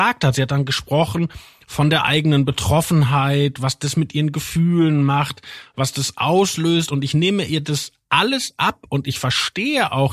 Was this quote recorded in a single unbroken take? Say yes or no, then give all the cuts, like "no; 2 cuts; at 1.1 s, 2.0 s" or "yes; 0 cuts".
yes; 0 cuts